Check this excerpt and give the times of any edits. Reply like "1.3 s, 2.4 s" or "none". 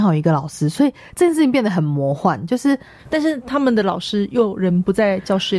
3.0 s